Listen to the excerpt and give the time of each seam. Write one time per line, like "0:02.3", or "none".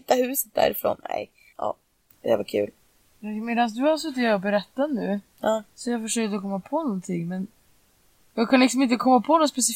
0:01.5
0:03.1